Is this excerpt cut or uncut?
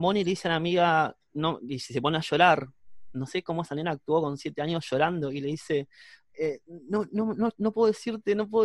uncut